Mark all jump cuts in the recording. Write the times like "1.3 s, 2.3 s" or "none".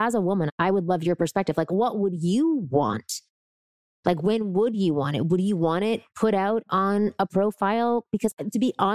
none

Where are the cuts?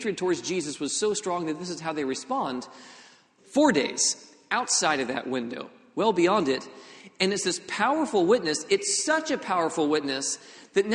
3.4 s

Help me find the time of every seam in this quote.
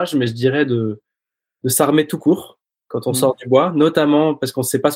none

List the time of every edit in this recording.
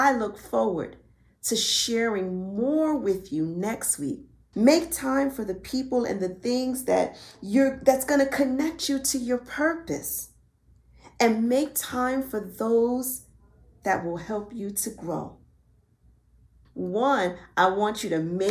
4.5 s, 16.6 s

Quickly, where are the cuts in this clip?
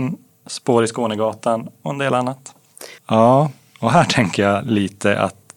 3.0 s

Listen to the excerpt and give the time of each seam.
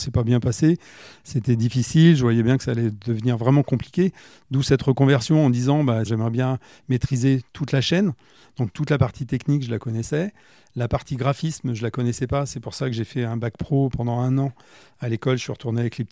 6.1 s

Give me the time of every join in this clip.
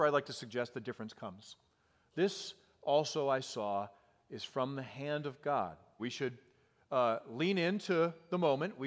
2.1 s, 6.0 s

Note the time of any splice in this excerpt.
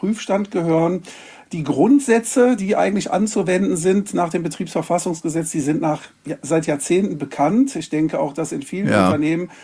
none

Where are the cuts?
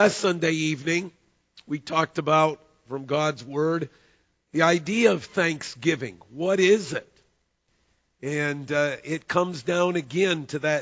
none

